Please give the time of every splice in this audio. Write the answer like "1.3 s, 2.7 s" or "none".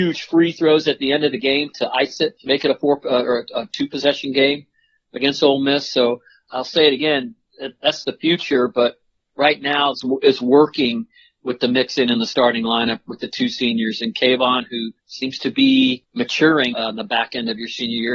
9.9 s, 15.0 s, 16.7 s